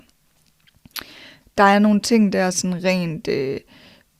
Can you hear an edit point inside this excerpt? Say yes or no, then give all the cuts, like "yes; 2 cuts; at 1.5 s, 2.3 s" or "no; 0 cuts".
yes; 1 cut; at 1.4 s